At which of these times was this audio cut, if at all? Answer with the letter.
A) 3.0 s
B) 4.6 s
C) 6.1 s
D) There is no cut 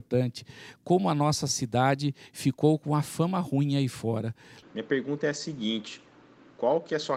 B